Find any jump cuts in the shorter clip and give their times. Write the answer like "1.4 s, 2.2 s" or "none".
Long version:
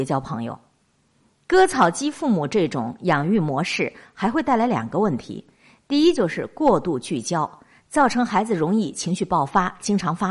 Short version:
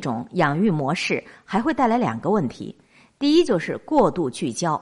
none